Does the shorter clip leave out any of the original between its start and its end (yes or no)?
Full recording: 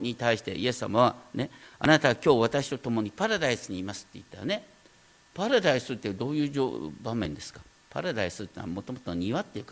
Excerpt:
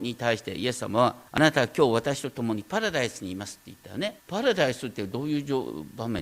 yes